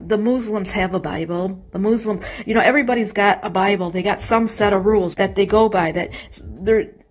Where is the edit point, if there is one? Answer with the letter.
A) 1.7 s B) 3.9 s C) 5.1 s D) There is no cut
C